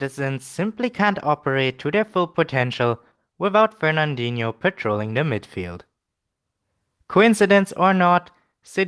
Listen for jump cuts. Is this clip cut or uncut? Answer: uncut